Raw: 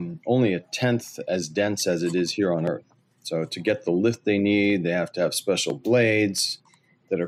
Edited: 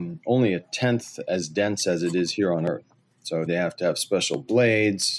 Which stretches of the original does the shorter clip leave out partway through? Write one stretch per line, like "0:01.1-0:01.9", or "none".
0:03.5-0:04.8